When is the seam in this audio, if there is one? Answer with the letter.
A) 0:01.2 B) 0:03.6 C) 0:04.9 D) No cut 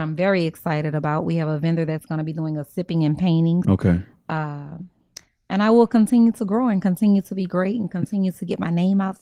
B